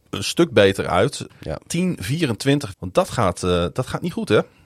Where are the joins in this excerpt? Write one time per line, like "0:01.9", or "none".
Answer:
0:01.3
0:02.7